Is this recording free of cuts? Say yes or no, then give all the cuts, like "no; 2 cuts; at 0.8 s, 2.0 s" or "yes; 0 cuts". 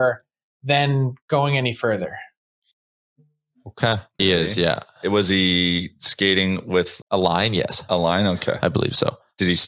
no; 2 cuts; at 4.2 s, 7.0 s